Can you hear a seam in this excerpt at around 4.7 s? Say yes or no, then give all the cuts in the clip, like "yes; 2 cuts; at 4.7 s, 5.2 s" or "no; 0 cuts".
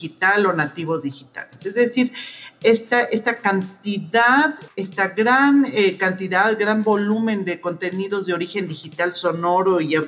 yes; 1 cut; at 4.7 s